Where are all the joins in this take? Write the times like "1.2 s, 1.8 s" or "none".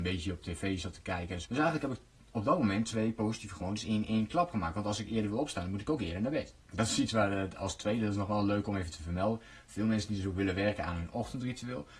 1.4 s, 6.6 s